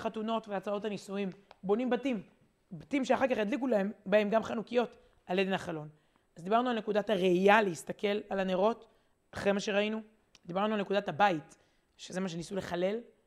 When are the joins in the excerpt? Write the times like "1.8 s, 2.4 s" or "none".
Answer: none